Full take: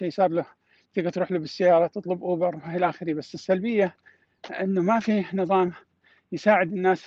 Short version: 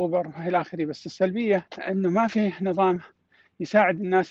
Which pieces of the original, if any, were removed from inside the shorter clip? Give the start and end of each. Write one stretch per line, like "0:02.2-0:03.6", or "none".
0:04.0-0:04.4

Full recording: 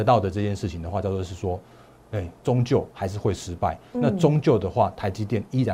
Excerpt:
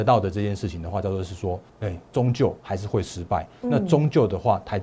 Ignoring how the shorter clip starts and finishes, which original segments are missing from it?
0:01.7-0:02.0

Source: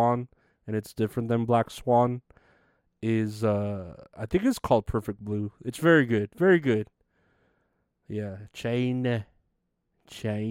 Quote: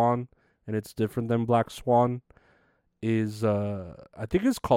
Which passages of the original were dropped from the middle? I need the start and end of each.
none

